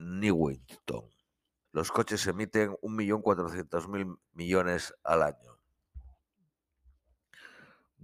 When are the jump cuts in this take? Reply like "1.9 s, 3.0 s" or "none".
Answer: 1.7 s, 4.3 s